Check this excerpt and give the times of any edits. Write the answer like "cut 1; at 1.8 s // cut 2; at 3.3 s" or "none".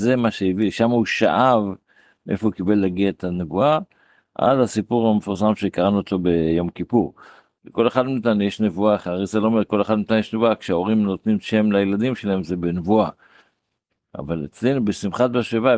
cut 1; at 7.6 s